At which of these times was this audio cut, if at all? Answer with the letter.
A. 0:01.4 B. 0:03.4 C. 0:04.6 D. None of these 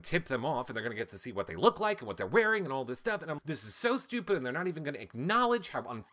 B